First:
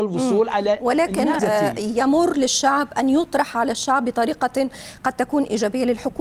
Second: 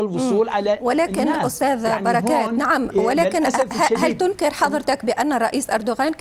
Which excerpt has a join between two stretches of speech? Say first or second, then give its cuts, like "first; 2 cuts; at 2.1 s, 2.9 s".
first; 1 cut; at 1.4 s